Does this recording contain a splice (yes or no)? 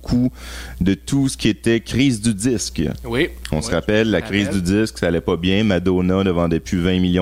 no